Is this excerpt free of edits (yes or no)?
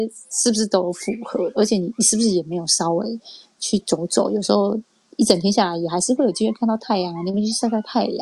yes